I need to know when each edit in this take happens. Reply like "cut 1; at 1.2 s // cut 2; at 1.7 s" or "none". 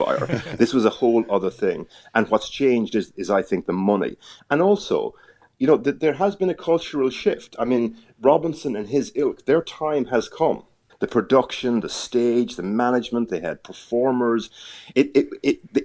cut 1; at 3.1 s // cut 2; at 10.9 s // cut 3; at 13.3 s

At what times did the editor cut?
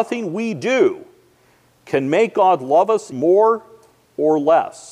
cut 1; at 3.1 s

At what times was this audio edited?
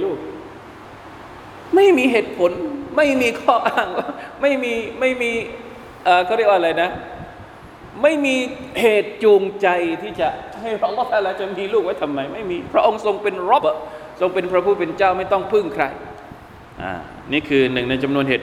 cut 1; at 13.6 s

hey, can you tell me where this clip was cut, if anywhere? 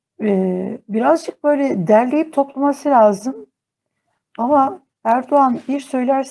none

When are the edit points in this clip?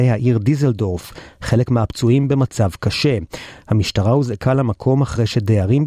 none

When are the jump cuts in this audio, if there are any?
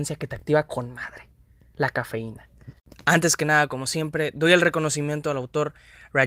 none

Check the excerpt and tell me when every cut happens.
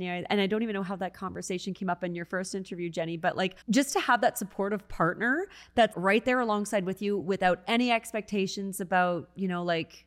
cut 1; at 3.6 s // cut 2; at 5.9 s

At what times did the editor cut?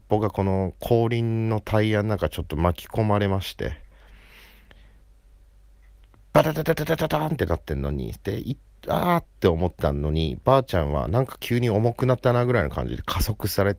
none

